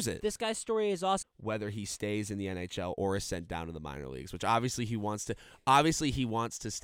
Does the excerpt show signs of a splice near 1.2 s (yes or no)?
yes